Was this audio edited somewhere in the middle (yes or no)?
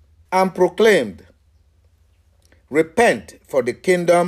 no